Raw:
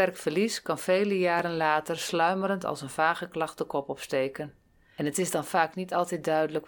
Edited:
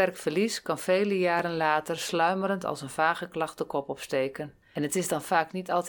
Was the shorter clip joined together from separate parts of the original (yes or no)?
yes